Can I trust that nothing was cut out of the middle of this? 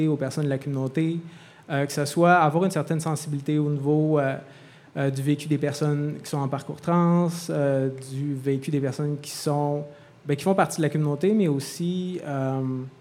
yes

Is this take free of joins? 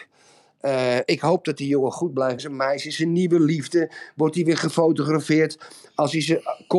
no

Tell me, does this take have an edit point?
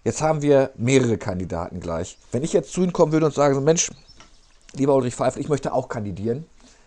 yes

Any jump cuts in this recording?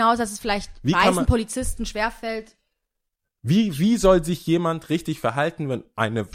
no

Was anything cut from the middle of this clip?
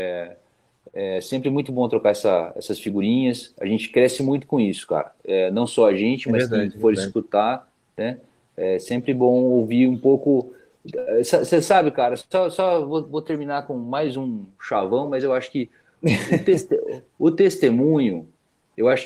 no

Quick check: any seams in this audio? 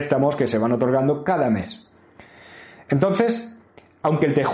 no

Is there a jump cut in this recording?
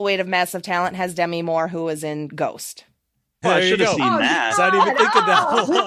yes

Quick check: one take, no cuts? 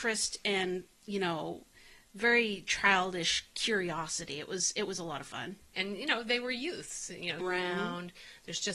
no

